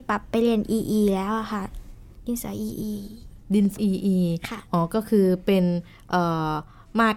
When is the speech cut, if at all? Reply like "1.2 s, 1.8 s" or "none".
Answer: 3.8 s